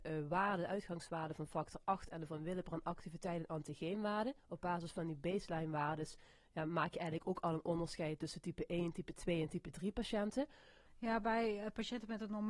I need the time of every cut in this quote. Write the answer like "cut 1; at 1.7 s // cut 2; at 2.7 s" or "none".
cut 1; at 4.4 s // cut 2; at 10.9 s